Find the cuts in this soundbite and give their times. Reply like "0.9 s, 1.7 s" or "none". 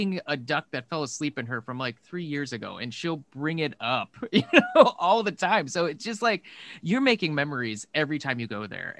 none